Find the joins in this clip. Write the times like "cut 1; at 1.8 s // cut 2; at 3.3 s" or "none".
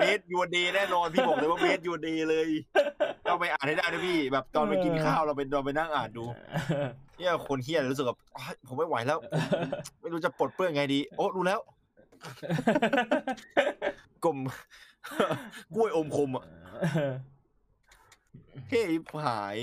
cut 1; at 7.1 s